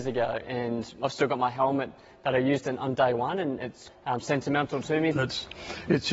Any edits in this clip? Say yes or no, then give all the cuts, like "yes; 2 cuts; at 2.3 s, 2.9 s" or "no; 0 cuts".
yes; 2 cuts; at 3.9 s, 5.1 s